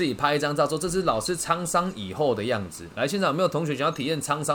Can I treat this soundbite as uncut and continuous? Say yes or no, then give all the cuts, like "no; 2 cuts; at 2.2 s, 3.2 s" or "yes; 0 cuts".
yes; 0 cuts